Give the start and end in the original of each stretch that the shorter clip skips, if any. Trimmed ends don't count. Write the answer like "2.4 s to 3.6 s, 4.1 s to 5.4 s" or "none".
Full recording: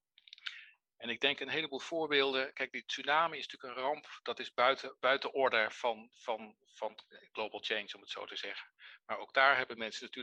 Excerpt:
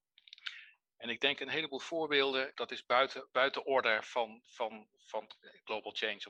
2.5 s to 4.2 s